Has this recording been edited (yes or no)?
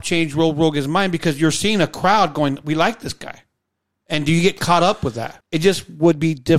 yes